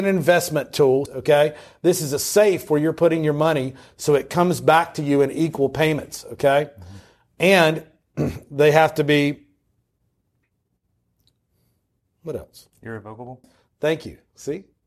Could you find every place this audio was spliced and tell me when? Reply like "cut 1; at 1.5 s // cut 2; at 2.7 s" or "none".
cut 1; at 1.1 s // cut 2; at 13.4 s

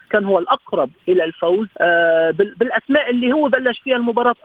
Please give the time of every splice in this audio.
cut 1; at 1.7 s

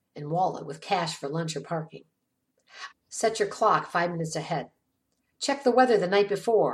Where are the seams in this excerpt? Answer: cut 1; at 2.9 s

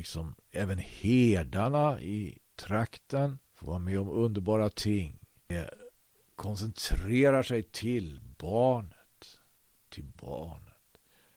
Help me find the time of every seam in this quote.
cut 1; at 3.4 s

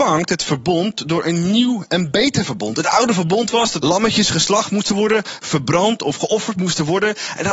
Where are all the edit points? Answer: cut 1; at 3.8 s

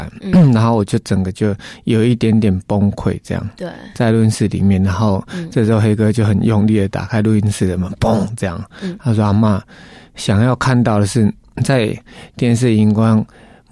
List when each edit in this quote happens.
none

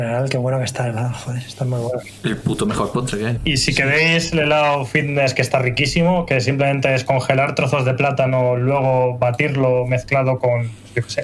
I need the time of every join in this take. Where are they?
cut 1; at 3.4 s

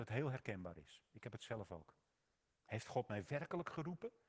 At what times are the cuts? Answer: cut 1; at 2.5 s

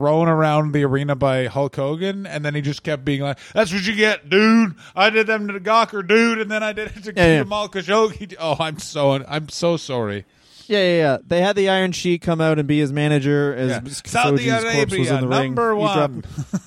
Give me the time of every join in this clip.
none

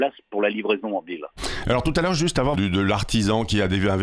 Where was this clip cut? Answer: cut 1; at 2.5 s

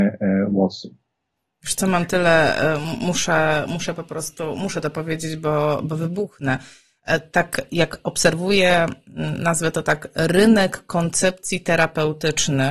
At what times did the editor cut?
none

